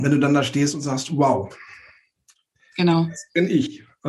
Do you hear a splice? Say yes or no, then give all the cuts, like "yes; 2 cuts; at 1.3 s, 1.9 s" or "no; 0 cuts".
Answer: no; 0 cuts